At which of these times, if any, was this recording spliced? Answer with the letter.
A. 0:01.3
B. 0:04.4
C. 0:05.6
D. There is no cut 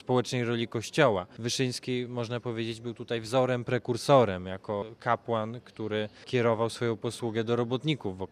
D